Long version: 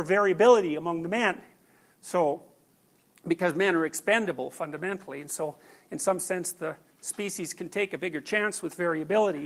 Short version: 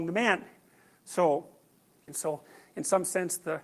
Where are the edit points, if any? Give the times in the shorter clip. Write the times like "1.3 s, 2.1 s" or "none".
2.1 s